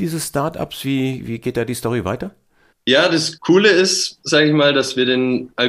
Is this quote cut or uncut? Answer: uncut